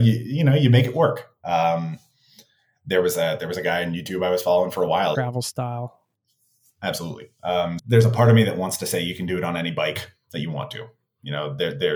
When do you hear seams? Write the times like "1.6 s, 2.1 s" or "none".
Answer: 5.1 s, 7.8 s